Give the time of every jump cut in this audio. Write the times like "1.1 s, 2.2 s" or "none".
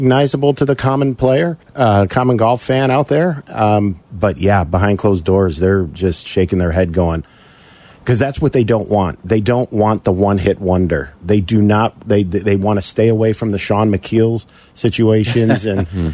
1.6 s